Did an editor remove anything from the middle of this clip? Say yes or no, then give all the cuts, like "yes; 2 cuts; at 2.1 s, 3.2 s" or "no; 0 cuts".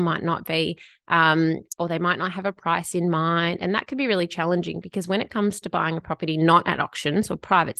yes; 1 cut; at 1.8 s